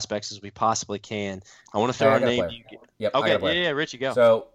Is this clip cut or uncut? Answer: uncut